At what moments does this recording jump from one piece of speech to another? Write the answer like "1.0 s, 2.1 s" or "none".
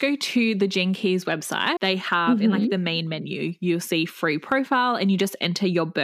1.8 s